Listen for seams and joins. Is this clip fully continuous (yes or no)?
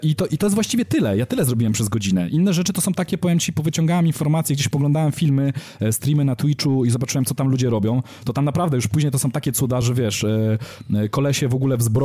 yes